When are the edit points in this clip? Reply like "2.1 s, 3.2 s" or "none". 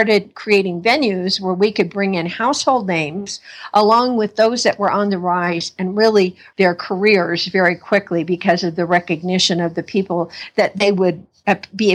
6.5 s